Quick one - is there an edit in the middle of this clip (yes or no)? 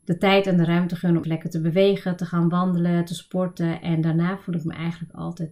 yes